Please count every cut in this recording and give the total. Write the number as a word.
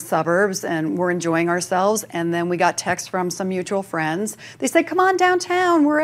zero